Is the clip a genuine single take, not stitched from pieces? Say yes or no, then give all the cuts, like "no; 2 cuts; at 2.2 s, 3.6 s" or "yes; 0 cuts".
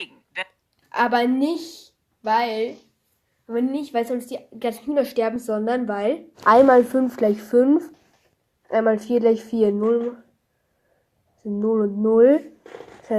no; 1 cut; at 6.3 s